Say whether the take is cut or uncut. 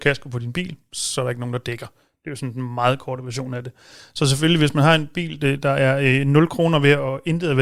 uncut